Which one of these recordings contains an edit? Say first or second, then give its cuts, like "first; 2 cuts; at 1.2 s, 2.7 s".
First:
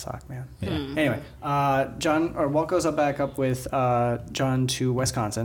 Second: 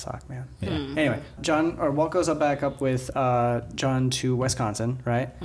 second; 1 cut; at 1.4 s